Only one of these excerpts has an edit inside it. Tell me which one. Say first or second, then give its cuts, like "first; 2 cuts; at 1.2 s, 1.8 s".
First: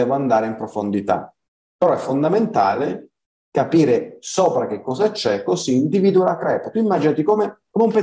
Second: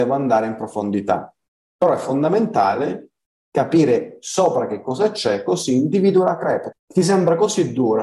second; 1 cut; at 6.7 s